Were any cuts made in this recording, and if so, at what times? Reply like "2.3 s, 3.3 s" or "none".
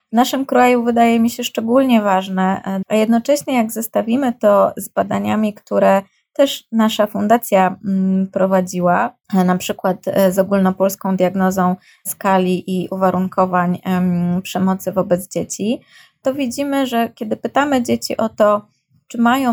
2.8 s, 9.2 s